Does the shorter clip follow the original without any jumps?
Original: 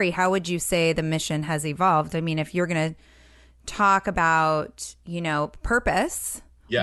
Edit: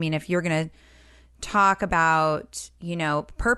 yes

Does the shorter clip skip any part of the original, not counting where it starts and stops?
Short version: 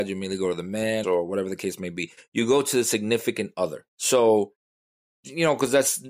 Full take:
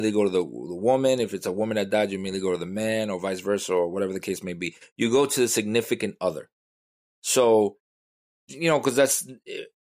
yes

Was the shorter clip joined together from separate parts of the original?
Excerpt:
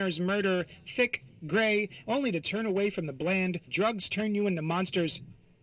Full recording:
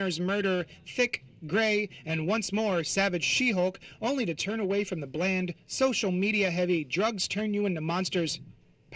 yes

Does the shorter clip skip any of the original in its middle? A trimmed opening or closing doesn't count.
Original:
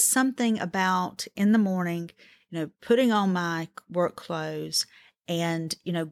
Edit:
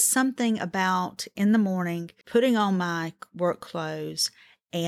yes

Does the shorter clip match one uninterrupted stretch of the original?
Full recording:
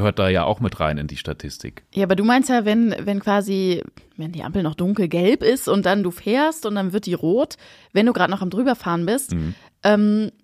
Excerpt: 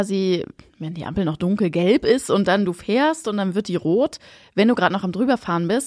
yes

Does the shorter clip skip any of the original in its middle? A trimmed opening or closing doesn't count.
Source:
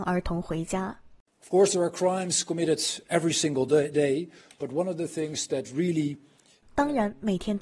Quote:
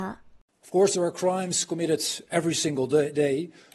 no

